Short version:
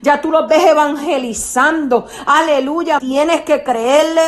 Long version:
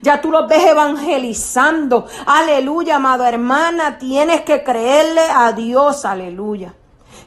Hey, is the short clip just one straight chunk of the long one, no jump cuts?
no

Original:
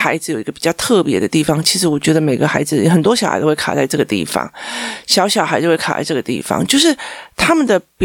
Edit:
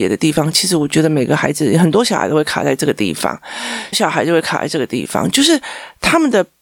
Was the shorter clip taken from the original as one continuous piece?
no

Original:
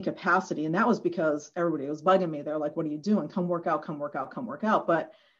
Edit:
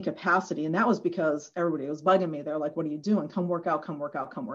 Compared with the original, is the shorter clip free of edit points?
yes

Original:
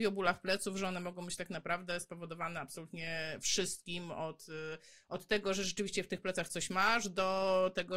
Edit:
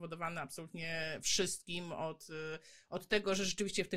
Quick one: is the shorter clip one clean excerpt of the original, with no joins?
yes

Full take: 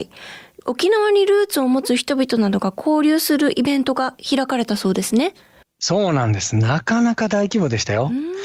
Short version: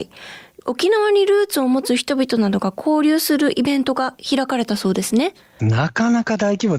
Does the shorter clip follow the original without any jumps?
no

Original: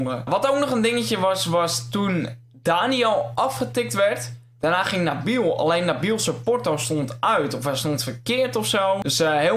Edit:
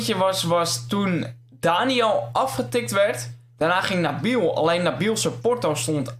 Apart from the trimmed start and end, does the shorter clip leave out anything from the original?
no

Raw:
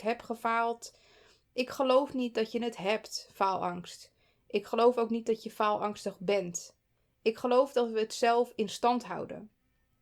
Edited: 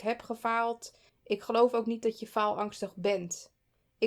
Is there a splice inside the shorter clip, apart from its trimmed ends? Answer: yes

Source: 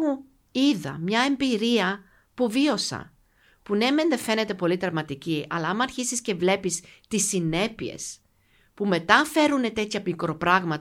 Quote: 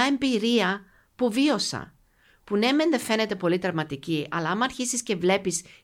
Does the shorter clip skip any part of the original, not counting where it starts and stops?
no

